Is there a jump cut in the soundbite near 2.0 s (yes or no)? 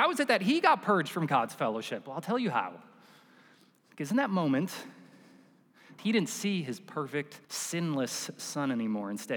no